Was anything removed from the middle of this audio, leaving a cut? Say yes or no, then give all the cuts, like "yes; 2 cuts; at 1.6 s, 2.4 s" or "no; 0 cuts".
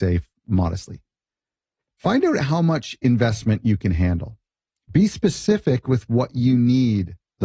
no; 0 cuts